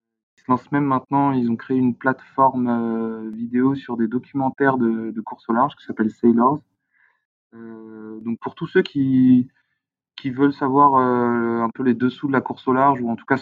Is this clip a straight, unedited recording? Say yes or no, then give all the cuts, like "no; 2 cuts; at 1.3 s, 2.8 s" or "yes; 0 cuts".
yes; 0 cuts